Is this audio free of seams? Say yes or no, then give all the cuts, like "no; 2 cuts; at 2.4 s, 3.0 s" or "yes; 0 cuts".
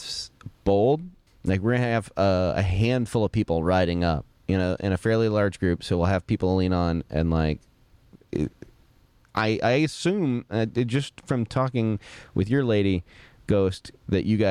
no; 1 cut; at 1.3 s